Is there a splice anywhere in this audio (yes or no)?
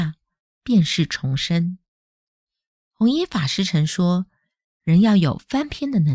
no